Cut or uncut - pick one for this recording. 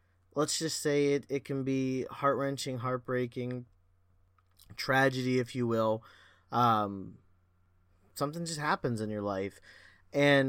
uncut